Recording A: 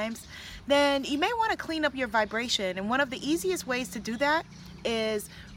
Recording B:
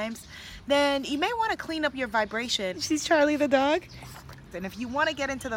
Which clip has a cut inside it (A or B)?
B